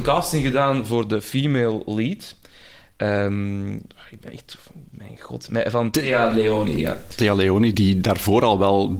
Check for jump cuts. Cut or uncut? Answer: cut